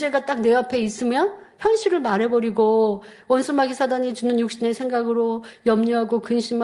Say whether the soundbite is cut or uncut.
uncut